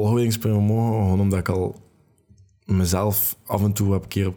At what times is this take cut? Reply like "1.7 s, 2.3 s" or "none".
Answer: none